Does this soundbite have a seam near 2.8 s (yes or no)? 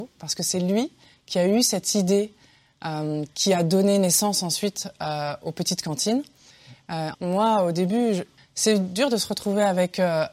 no